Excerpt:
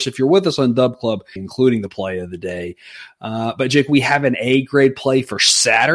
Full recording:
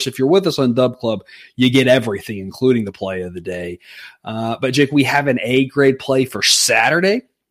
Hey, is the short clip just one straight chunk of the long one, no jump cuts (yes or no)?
no